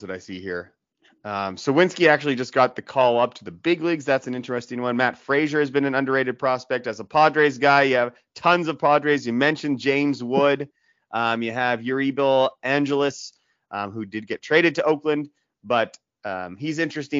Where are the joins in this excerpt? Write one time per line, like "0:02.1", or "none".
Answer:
none